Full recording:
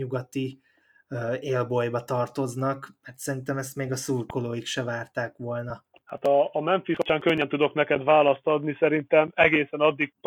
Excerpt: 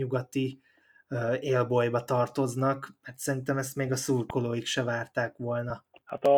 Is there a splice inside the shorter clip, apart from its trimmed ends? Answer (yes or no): no